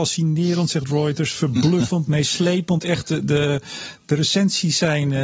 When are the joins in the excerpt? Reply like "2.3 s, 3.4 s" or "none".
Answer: none